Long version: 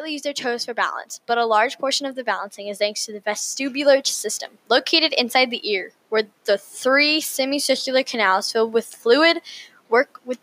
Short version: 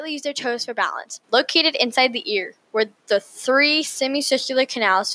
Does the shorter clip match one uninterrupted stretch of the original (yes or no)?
no